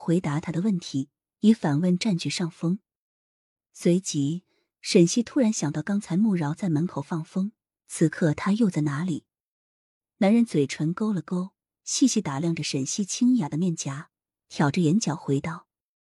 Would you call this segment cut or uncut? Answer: uncut